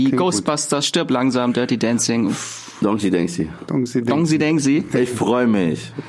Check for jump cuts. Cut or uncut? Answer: uncut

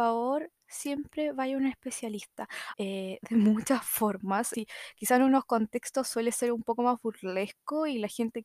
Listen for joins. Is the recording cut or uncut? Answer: cut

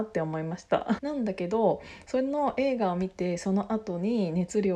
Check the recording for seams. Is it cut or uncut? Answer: cut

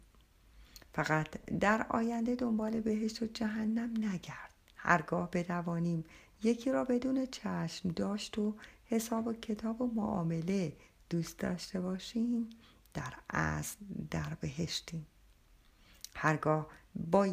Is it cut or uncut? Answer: cut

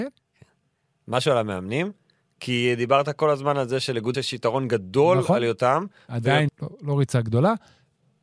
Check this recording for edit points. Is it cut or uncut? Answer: cut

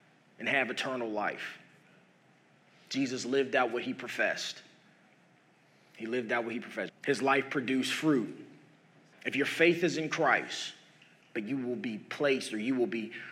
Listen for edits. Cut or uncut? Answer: cut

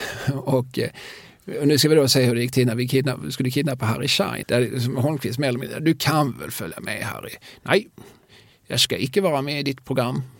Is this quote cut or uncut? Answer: cut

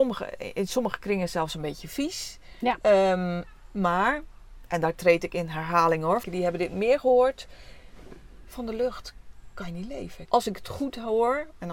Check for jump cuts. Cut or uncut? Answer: cut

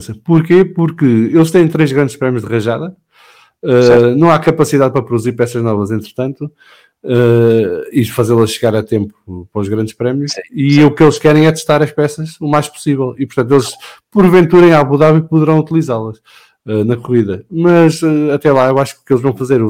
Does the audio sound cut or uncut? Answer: uncut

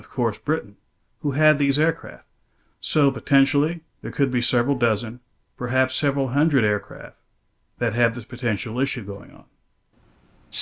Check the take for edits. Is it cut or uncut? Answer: uncut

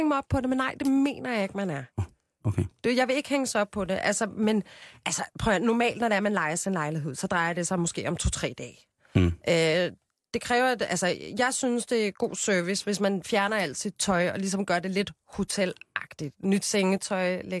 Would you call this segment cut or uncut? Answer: uncut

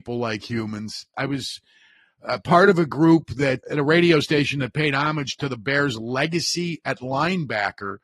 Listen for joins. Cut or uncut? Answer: cut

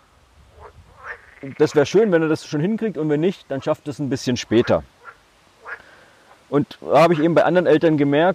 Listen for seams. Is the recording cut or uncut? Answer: uncut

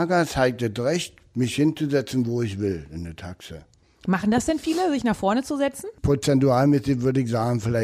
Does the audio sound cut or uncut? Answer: uncut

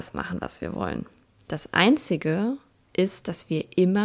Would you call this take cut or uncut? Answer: uncut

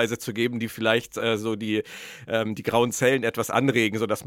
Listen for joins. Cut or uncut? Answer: uncut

